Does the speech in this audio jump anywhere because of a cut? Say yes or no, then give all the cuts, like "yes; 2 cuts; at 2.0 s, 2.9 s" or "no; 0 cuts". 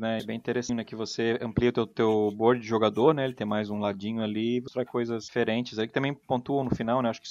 no; 0 cuts